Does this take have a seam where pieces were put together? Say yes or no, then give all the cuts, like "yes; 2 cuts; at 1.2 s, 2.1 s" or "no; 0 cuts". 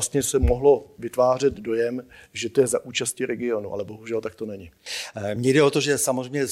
no; 0 cuts